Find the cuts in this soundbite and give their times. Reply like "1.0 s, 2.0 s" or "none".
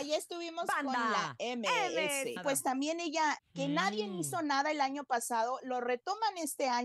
2.4 s, 3.4 s